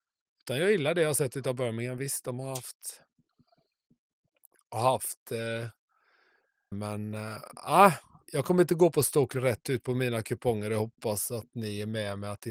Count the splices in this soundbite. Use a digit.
1